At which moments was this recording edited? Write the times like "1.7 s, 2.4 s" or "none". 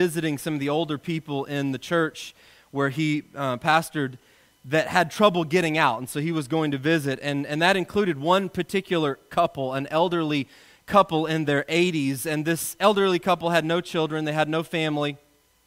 none

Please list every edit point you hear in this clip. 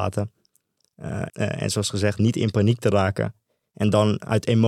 1.3 s

